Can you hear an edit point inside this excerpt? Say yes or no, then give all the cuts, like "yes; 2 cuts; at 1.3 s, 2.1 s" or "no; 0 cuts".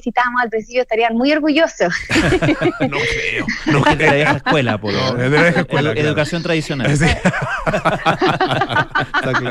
no; 0 cuts